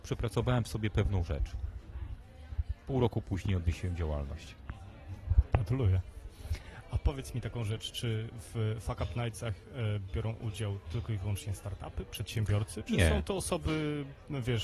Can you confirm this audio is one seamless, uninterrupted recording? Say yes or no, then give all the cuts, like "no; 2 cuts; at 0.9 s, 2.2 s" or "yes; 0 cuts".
yes; 0 cuts